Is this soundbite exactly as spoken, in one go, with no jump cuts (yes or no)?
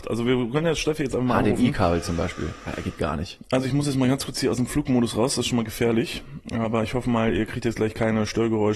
yes